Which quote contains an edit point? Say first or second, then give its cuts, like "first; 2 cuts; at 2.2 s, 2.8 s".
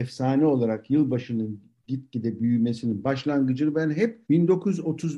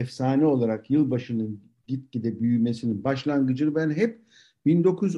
first; 1 cut; at 4.2 s